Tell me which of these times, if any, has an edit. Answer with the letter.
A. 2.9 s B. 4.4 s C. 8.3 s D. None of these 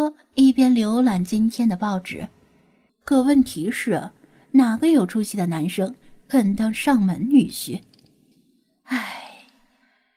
A